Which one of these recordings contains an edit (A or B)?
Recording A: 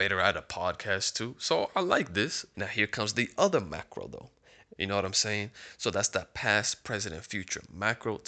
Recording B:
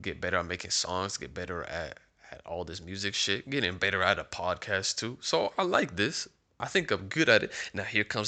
A